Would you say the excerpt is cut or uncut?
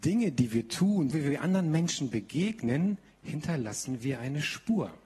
cut